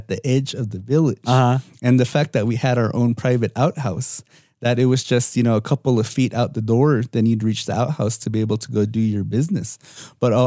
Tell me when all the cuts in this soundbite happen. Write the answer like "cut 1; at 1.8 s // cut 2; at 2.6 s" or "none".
none

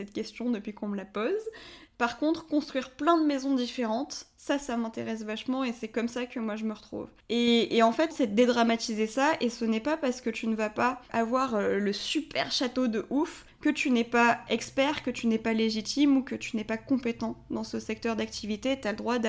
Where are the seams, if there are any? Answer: cut 1; at 1.9 s // cut 2; at 8.1 s

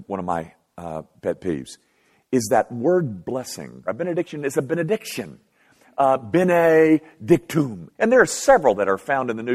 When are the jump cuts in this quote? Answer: cut 1; at 3.9 s // cut 2; at 7.9 s

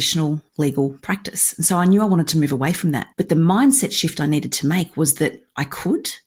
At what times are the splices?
cut 1; at 3.1 s

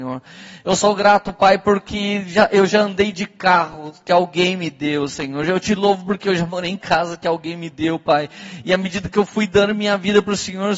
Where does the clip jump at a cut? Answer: none

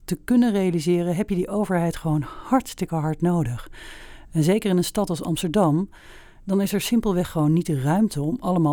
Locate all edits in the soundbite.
none

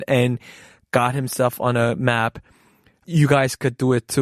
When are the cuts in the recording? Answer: none

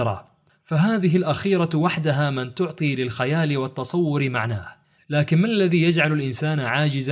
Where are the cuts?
cut 1; at 5.0 s

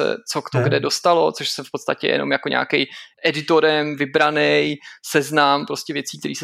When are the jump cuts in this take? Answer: cut 1; at 3.1 s

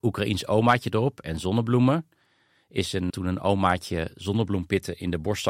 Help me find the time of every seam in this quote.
cut 1; at 3.1 s

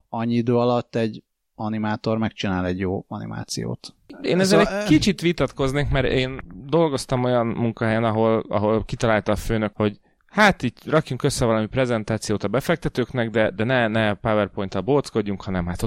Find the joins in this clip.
cut 1; at 9.7 s

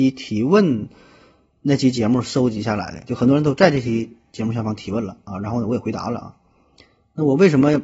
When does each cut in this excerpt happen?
none

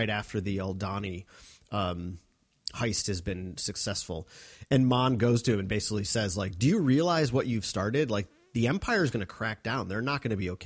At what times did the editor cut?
none

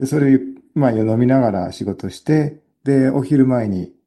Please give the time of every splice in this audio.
none

